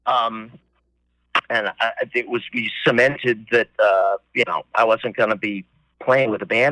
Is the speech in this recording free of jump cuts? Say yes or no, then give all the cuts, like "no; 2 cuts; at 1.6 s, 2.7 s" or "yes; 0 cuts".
no; 1 cut; at 1.4 s